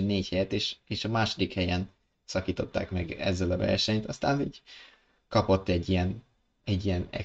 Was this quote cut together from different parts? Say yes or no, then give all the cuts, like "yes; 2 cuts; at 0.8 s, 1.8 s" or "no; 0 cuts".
no; 0 cuts